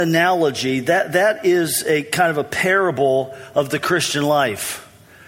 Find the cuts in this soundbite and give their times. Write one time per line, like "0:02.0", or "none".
none